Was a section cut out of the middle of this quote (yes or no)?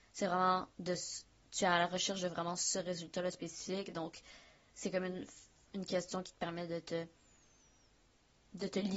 no